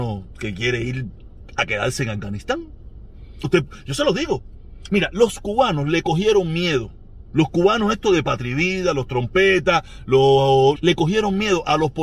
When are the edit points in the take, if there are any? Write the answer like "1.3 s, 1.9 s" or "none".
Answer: 3.4 s, 10.7 s